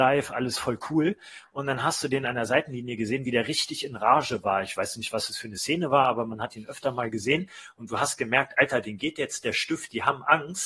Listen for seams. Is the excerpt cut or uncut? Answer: uncut